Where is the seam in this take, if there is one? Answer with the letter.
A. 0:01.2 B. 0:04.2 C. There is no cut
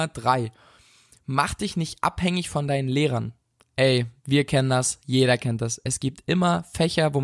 B